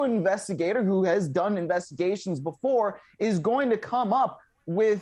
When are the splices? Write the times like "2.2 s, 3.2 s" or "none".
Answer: none